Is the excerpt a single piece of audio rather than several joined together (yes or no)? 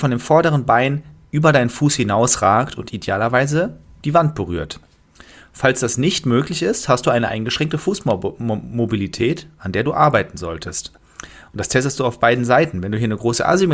yes